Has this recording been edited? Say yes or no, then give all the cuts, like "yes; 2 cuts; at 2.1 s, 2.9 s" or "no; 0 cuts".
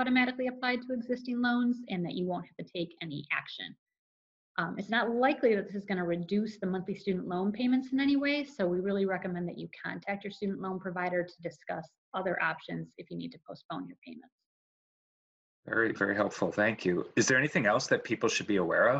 no; 0 cuts